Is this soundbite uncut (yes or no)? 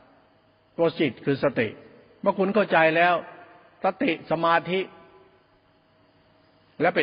yes